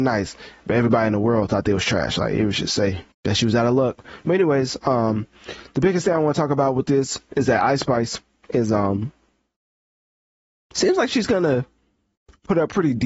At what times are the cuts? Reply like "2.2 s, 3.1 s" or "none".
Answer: 3.1 s

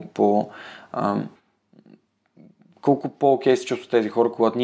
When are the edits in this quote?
none

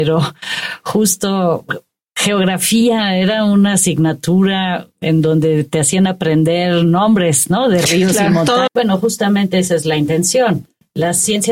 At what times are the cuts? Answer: 8.7 s

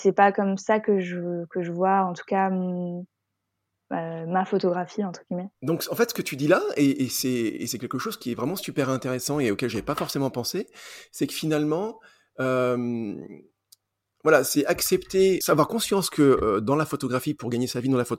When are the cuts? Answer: 15.4 s

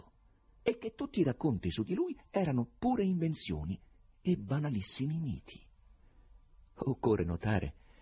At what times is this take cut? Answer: none

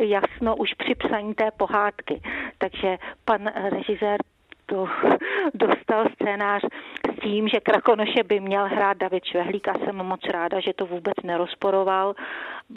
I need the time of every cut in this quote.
none

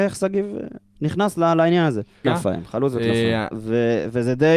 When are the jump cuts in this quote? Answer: 2.2 s, 3.5 s

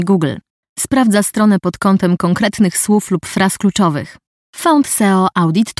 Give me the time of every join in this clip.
4.4 s

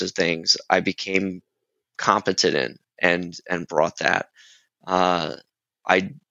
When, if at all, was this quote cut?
none

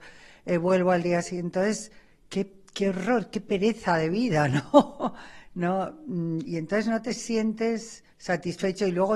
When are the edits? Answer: 8.1 s

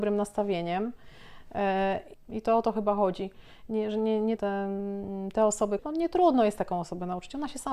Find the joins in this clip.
2.1 s, 4.4 s, 5.8 s

